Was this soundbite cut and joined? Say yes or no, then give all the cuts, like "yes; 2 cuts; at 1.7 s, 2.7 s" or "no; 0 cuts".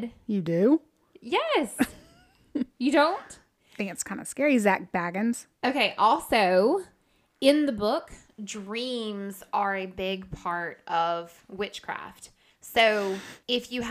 no; 0 cuts